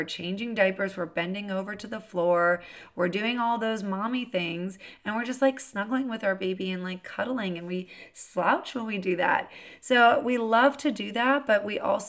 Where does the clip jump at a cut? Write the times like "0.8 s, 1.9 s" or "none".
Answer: none